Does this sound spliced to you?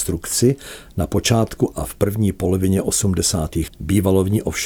yes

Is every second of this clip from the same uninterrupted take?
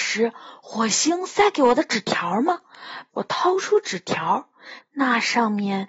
no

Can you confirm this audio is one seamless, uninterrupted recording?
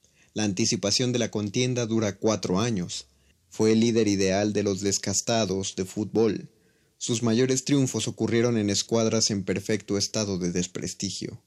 no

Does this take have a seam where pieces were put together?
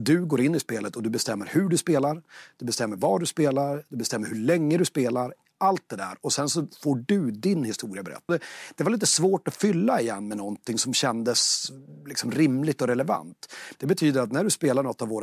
yes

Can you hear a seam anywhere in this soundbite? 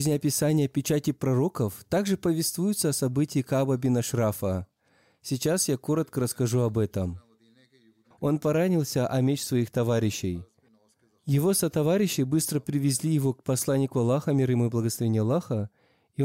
yes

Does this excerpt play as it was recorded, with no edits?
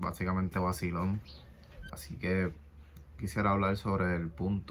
no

